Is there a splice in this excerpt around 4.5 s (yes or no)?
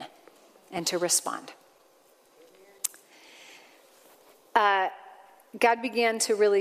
no